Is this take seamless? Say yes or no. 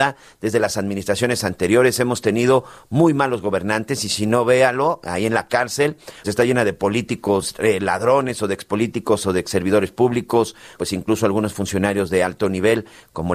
no